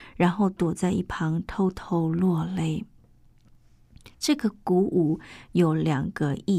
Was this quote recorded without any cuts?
yes; 0 cuts

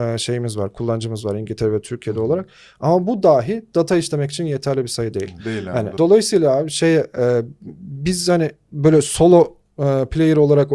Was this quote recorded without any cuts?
no; 1 cut; at 6.0 s

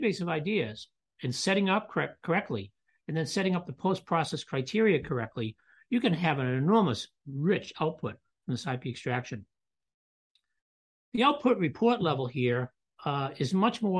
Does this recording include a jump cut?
no; 0 cuts

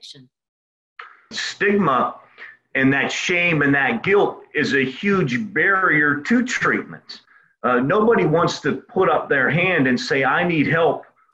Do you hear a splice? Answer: yes; 1 cut; at 1.3 s

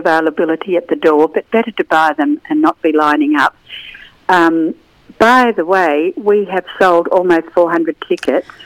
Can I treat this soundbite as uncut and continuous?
yes; 0 cuts

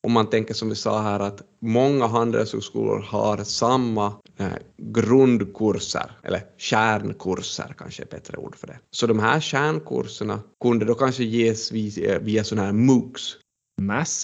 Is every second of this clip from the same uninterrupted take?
yes; 0 cuts

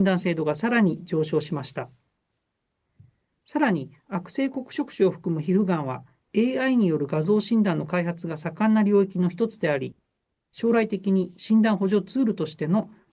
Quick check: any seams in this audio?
no; 0 cuts

